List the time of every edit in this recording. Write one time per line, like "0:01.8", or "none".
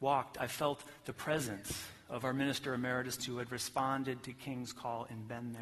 0:03.2